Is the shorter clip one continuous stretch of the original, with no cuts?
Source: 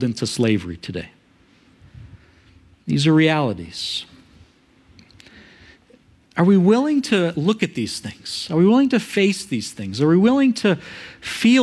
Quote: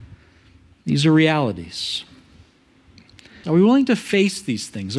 no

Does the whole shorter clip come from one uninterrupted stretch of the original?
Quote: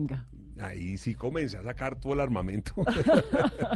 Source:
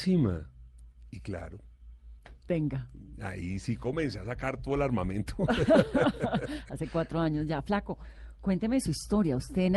yes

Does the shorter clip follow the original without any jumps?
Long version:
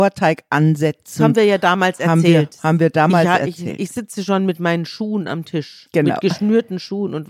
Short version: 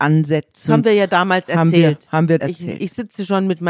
no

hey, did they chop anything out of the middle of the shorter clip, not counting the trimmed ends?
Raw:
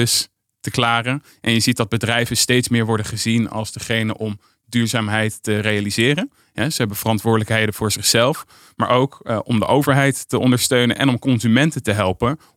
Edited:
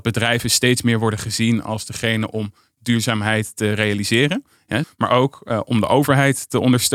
yes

